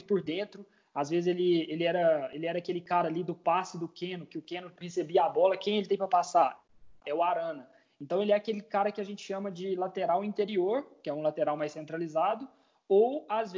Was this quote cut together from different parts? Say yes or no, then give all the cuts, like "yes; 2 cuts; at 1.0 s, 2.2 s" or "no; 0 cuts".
no; 0 cuts